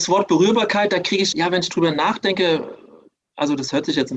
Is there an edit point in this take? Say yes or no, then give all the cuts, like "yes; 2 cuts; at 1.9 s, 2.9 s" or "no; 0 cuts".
yes; 1 cut; at 1.3 s